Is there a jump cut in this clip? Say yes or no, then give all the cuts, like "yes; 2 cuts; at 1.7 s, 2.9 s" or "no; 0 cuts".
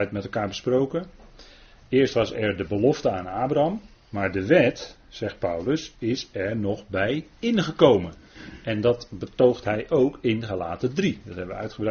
no; 0 cuts